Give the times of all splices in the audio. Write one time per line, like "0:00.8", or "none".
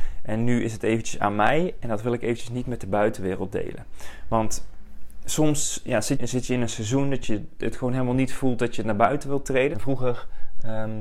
0:06.2
0:09.7